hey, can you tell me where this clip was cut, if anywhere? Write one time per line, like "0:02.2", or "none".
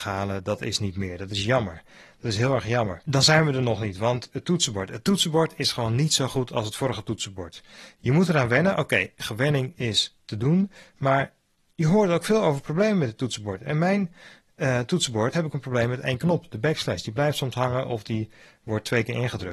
0:15.3